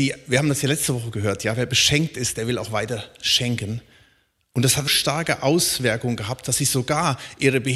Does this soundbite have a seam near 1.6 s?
no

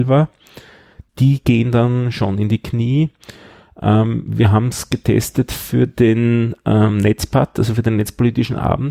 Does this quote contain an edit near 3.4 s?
no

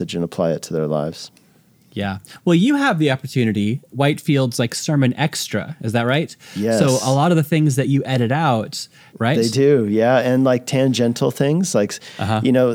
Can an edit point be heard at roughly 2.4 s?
no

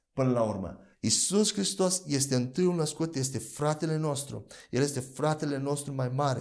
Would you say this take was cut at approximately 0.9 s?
yes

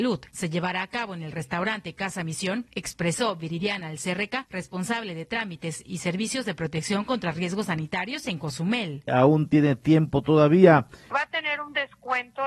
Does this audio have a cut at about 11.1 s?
yes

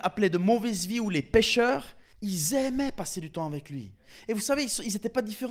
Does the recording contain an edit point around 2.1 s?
yes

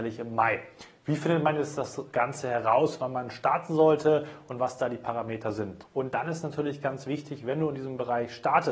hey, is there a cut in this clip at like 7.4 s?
no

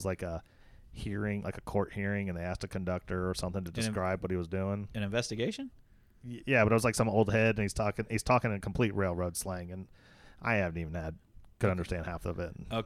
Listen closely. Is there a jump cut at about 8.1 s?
no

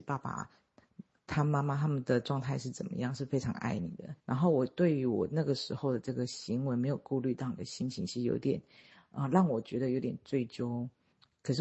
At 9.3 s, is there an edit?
no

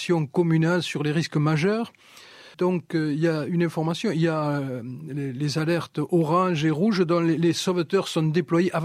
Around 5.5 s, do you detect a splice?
no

